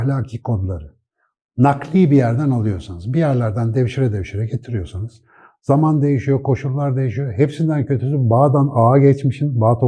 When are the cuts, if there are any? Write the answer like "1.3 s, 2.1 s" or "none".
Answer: none